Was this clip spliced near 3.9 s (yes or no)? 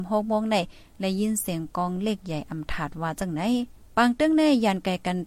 yes